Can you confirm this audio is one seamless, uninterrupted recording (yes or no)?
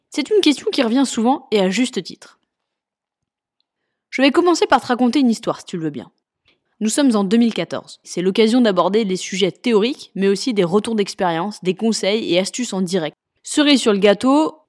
no